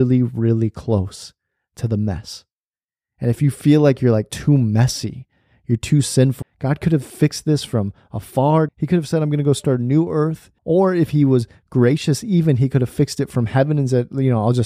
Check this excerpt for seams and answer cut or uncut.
cut